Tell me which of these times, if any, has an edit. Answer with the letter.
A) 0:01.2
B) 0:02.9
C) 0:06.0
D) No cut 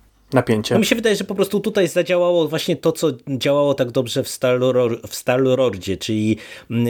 D